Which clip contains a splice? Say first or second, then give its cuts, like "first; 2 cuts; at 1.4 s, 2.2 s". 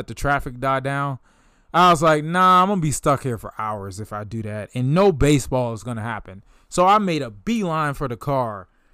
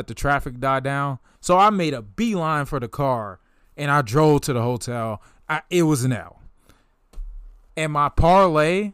second; 2 cuts; at 1.3 s, 7.7 s